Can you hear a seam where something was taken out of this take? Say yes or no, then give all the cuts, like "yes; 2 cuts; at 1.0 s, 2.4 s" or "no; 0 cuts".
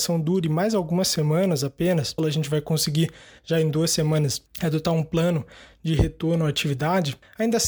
yes; 1 cut; at 2.2 s